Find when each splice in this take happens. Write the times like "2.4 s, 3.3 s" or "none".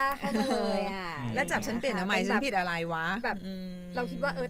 none